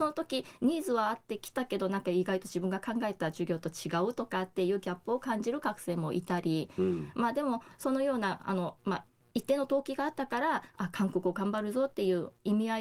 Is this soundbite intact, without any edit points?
yes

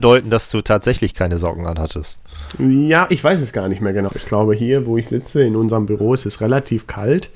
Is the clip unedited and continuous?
no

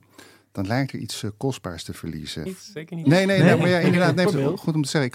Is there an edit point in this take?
yes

